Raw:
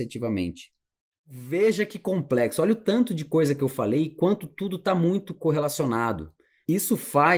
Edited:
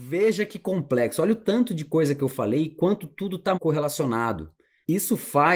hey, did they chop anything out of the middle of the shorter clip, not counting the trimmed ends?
yes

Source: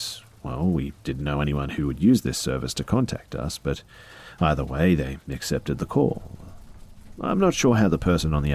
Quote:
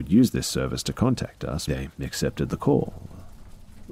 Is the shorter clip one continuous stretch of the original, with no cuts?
no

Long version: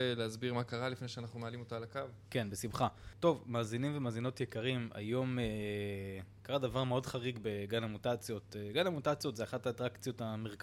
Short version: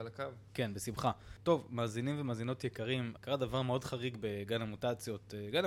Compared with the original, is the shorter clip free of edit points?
no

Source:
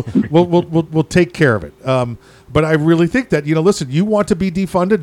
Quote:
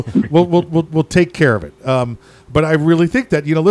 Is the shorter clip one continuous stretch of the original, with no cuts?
yes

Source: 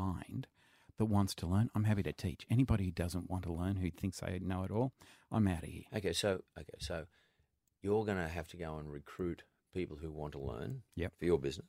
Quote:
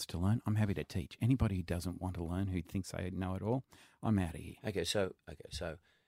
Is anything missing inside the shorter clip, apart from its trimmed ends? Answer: no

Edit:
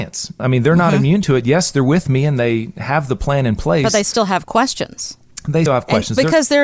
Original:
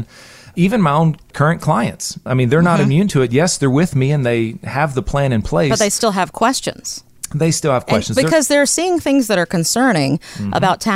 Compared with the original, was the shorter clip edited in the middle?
yes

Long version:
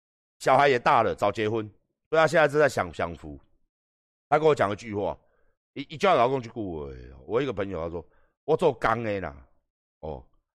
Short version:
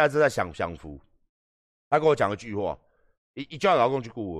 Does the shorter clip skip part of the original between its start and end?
no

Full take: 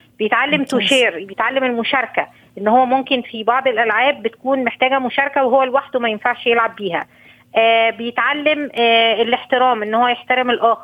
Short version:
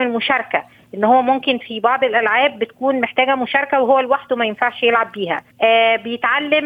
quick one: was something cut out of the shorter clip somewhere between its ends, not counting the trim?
yes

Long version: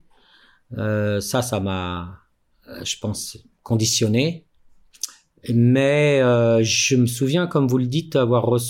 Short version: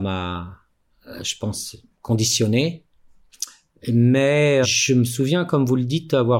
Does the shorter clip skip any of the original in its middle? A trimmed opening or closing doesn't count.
yes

